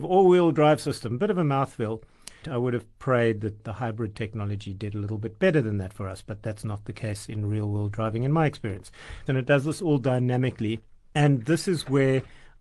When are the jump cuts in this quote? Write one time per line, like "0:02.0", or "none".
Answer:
0:02.4
0:09.3